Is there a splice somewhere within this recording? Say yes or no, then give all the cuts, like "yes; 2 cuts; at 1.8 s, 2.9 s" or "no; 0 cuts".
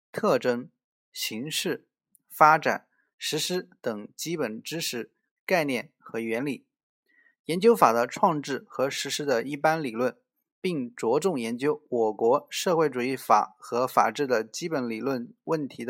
yes; 1 cut; at 1.0 s